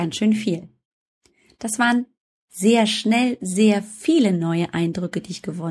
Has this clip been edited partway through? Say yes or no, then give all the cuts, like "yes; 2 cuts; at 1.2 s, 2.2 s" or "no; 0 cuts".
no; 0 cuts